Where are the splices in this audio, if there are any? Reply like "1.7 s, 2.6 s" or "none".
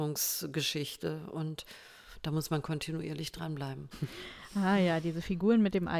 3.9 s